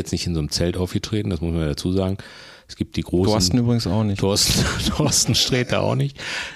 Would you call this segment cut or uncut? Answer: uncut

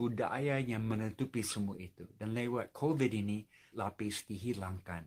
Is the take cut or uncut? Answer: cut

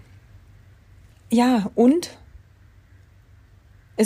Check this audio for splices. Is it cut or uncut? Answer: uncut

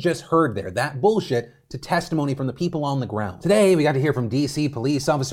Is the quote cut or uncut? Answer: uncut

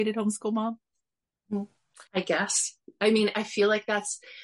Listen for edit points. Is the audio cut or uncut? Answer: cut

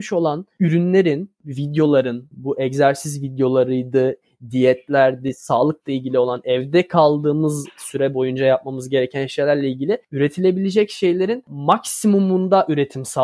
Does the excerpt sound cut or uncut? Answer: cut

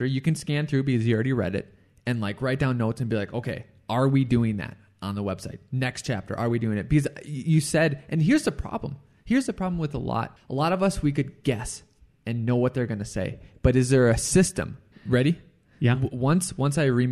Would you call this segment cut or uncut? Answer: cut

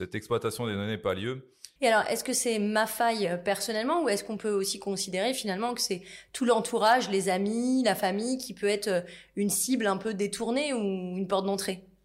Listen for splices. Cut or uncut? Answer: cut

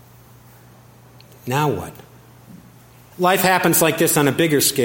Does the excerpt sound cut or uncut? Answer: cut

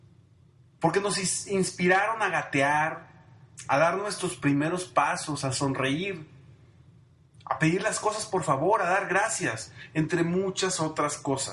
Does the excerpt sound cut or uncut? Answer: uncut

